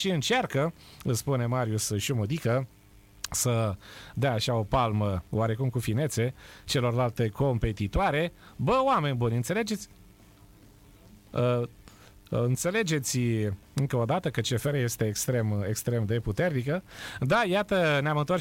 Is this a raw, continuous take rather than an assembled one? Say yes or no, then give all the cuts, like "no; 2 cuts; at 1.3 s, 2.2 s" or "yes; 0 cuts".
yes; 0 cuts